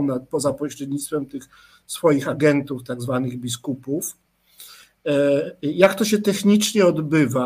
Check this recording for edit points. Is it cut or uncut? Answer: uncut